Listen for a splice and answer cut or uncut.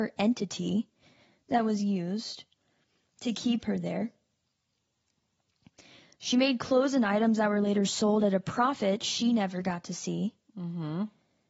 uncut